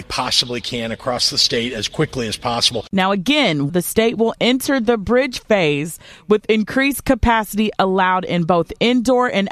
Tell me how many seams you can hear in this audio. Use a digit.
1